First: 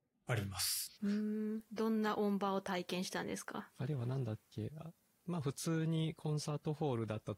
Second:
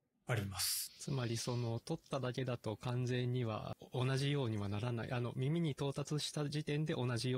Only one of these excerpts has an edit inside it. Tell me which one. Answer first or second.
first